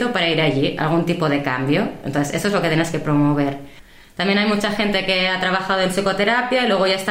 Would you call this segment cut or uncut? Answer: uncut